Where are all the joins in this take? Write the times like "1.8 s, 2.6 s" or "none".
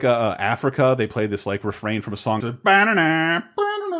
2.4 s